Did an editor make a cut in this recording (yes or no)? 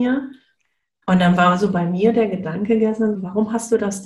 yes